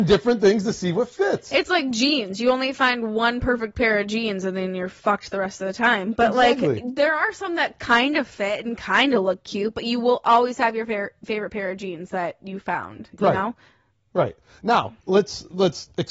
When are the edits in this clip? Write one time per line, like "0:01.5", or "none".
none